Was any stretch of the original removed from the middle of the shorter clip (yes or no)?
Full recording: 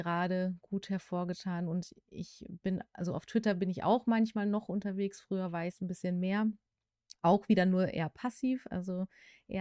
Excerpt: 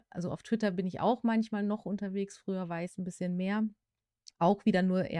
no